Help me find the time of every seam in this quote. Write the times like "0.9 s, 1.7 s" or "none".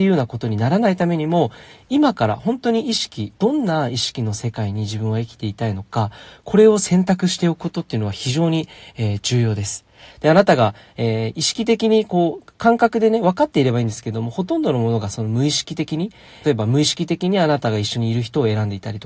10.1 s, 16.4 s

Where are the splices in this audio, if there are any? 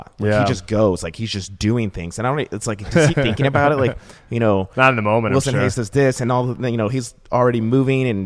3.1 s

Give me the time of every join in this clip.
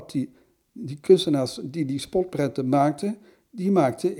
none

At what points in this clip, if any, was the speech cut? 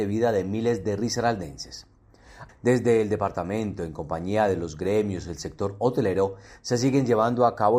2.5 s

